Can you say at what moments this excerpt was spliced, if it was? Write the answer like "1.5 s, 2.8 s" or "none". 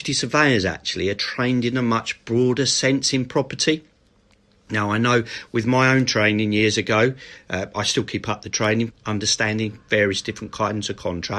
8.9 s